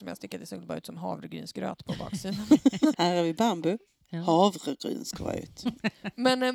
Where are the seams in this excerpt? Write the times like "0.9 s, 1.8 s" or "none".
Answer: 2.9 s